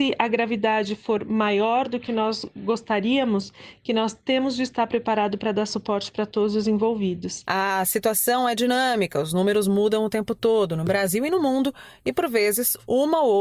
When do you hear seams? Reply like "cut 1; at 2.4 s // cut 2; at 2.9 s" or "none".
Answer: cut 1; at 7.4 s